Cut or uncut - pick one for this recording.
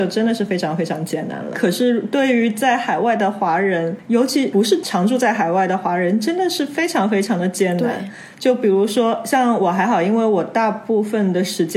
cut